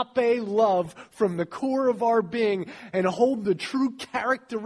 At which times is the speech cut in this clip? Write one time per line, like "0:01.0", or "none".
none